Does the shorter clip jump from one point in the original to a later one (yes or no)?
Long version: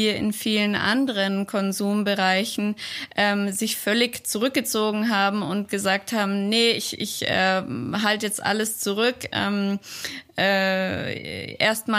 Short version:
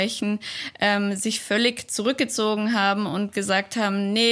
no